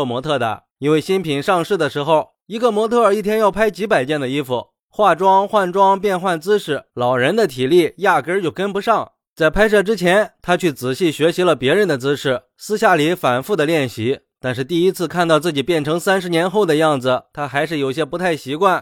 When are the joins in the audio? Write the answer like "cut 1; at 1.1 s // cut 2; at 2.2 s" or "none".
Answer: cut 1; at 6.9 s